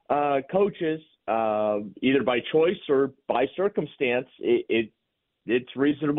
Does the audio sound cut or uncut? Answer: uncut